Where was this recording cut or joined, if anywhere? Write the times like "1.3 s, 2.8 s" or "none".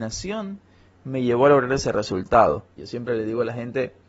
2.8 s